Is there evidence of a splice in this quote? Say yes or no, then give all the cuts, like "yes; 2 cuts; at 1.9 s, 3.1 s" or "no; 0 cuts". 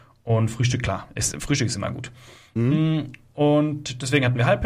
no; 0 cuts